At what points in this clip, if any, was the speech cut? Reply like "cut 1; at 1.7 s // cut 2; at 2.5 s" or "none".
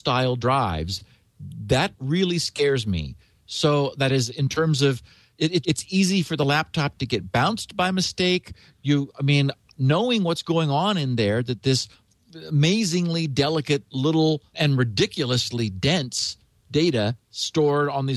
cut 1; at 5.6 s // cut 2; at 8.7 s // cut 3; at 14.5 s

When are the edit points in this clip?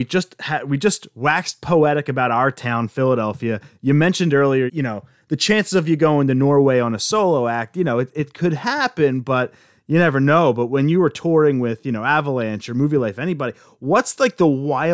cut 1; at 4.7 s

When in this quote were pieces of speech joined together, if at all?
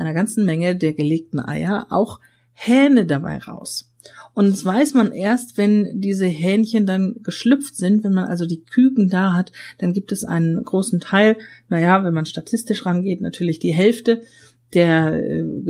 none

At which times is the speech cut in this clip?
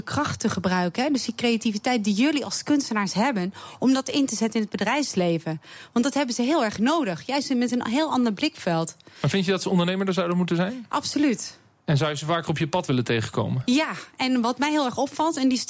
none

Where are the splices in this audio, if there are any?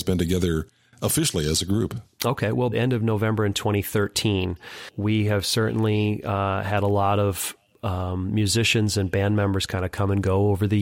cut 1; at 2.7 s

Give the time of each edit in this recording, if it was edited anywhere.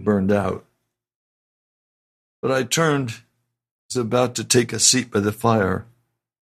none

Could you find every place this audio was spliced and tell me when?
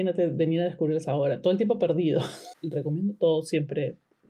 cut 1; at 2.5 s

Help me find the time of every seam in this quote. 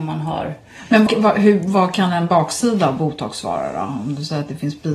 cut 1; at 1.1 s

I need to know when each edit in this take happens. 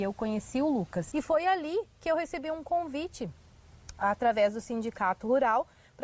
cut 1; at 1.1 s

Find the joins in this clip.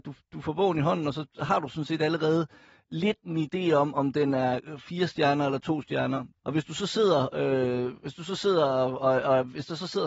cut 1; at 6.4 s

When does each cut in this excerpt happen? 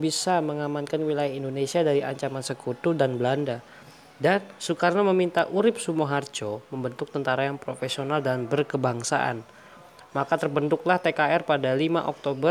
none

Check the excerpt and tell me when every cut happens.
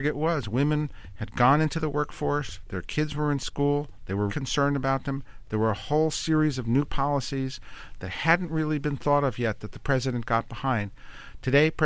cut 1; at 4.3 s

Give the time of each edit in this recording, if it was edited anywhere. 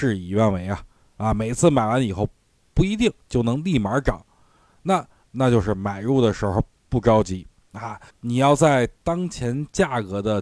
cut 1; at 5.2 s // cut 2; at 8.1 s

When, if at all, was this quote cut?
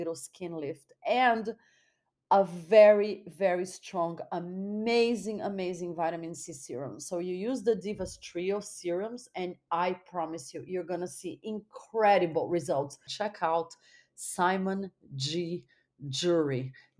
cut 1; at 13.1 s

